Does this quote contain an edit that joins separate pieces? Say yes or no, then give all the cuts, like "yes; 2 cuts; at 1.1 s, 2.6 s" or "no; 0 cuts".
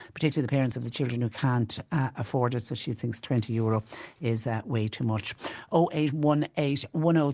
no; 0 cuts